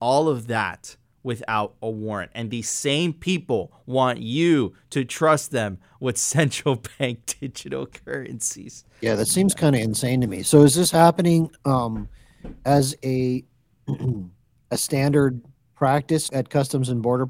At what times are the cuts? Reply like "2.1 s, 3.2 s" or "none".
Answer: 16.3 s